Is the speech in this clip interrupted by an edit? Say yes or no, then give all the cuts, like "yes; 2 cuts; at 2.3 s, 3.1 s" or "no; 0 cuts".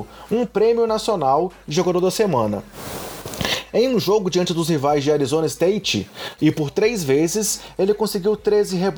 yes; 1 cut; at 6.4 s